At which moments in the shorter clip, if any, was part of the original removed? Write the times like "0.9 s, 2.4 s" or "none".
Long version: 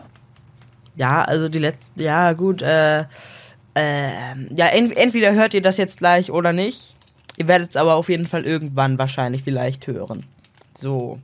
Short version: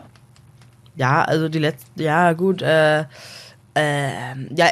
none